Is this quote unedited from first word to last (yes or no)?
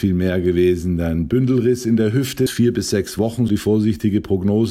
no